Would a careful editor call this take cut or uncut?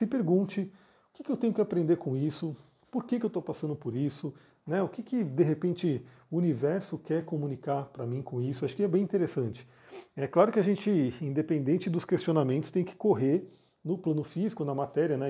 uncut